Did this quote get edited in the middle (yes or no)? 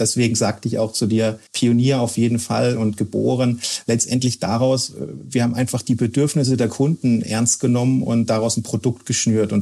yes